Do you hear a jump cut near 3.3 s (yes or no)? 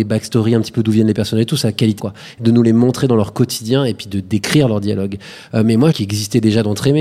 no